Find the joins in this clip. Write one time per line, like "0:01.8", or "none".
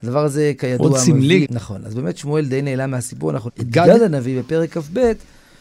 0:01.4
0:03.5